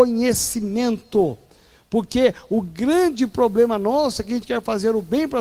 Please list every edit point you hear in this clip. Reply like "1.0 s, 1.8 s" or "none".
none